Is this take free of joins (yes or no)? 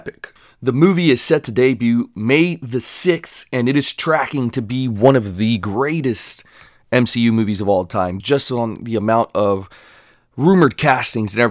no